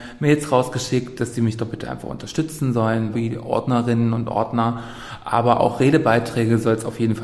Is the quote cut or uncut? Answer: cut